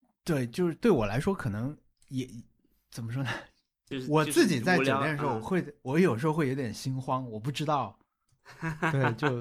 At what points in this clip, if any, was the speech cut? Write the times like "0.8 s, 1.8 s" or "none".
3.9 s, 8.4 s